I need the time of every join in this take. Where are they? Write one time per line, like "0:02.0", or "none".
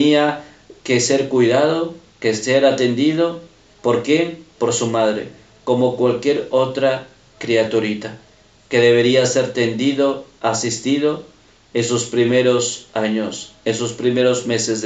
none

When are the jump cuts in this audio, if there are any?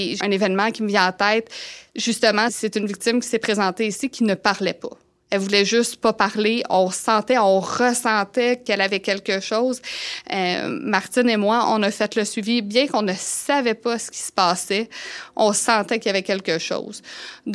0:11.6

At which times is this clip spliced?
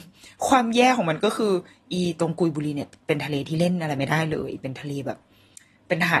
none

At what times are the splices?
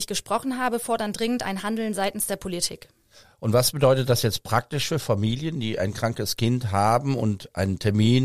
none

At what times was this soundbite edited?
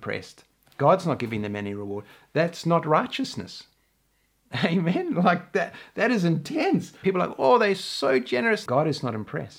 0:07.0
0:08.7

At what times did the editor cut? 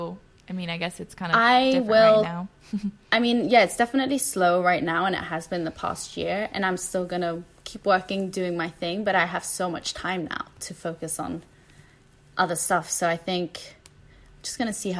none

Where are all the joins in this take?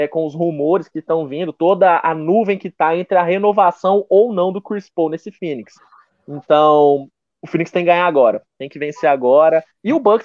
none

